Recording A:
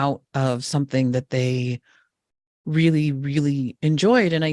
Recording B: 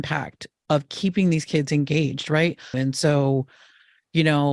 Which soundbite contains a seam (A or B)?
B